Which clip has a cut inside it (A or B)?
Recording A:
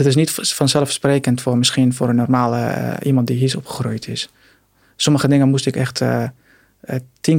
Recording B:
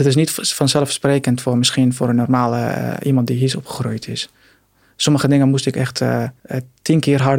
B